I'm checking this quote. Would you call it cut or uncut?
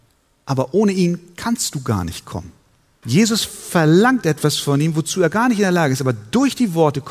cut